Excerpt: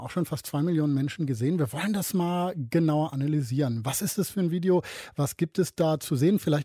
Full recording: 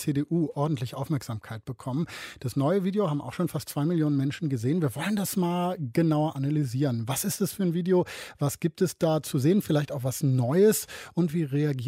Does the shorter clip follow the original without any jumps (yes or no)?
yes